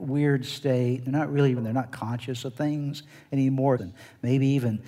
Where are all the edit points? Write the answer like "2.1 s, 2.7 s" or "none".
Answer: 1.6 s, 3.8 s